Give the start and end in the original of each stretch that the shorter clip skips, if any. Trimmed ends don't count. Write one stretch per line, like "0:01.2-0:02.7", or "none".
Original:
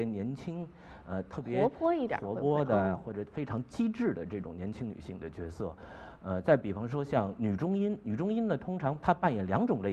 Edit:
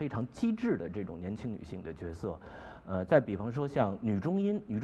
none